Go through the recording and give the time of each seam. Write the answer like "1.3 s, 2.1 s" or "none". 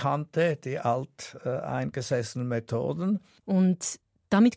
3.4 s